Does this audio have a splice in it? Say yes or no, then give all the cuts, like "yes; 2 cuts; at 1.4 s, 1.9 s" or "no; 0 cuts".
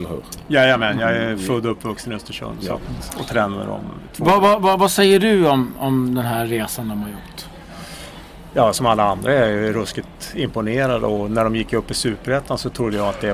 no; 0 cuts